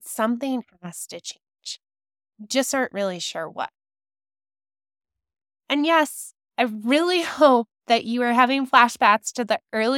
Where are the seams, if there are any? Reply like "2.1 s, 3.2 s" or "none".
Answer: none

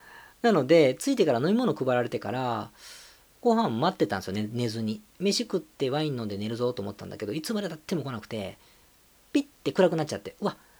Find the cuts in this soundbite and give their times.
none

